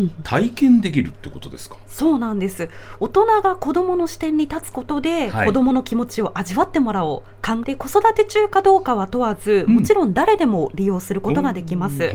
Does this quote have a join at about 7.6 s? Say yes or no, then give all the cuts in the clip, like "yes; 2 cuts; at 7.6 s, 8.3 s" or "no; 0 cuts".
yes; 1 cut; at 7.6 s